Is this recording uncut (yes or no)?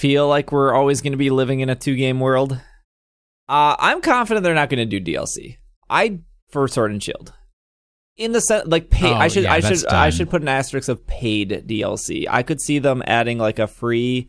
yes